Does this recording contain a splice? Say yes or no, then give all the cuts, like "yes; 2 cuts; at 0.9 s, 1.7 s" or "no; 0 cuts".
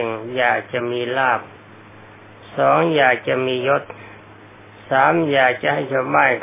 no; 0 cuts